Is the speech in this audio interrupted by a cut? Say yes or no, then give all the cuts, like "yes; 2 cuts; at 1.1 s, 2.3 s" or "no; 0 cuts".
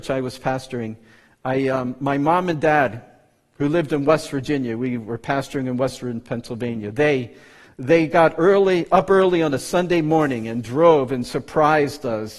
no; 0 cuts